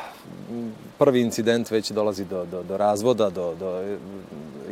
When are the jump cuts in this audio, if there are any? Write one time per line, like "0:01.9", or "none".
0:02.6